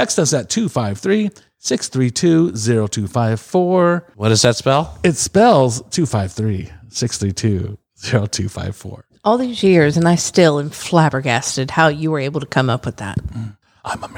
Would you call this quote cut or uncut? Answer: uncut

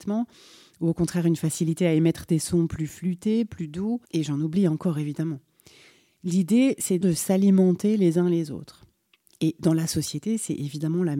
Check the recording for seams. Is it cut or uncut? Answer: cut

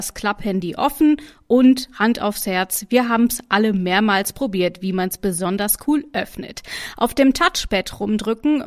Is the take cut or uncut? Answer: uncut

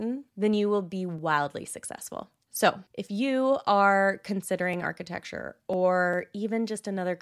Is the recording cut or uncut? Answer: uncut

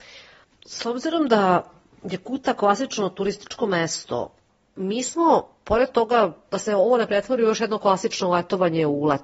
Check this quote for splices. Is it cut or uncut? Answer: cut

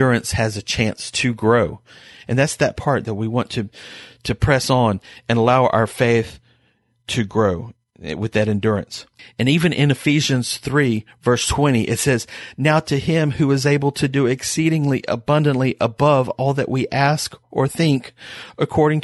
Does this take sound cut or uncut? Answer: uncut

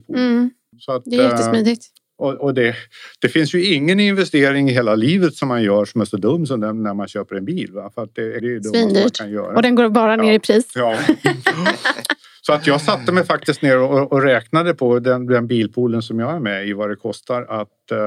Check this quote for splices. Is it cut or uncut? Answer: cut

